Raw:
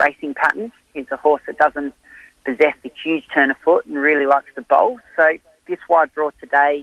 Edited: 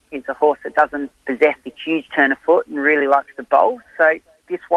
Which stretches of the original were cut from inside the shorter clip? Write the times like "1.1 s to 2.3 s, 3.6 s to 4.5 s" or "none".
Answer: 2.0 s to 2.4 s